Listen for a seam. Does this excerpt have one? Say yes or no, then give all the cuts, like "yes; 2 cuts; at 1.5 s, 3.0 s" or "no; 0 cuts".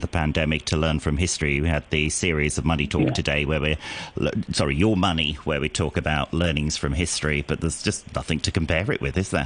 no; 0 cuts